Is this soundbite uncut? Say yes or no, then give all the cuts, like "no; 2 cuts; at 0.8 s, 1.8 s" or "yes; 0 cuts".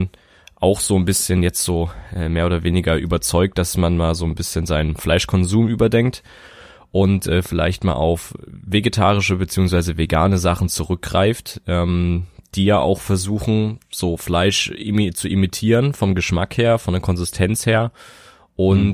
yes; 0 cuts